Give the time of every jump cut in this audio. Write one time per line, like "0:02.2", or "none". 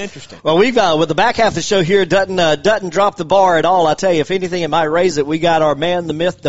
none